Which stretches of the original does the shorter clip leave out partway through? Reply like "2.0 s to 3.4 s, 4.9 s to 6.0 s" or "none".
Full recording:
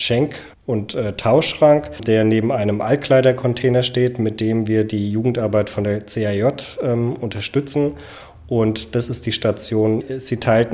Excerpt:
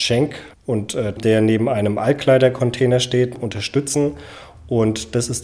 1.2 s to 2.0 s, 4.2 s to 7.1 s